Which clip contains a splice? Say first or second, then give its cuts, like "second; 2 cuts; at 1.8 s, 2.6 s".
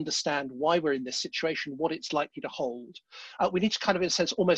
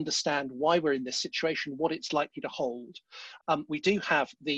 second; 1 cut; at 3.4 s